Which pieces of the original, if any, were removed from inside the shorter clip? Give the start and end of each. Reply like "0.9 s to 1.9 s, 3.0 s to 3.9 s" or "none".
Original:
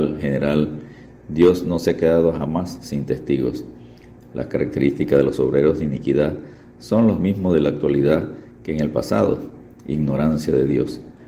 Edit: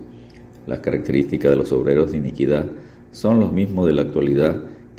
none